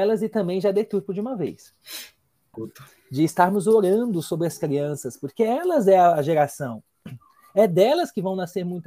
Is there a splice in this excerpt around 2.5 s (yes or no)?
yes